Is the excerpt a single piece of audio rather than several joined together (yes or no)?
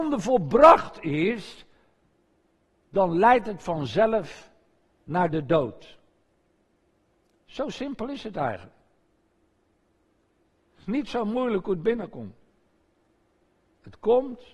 yes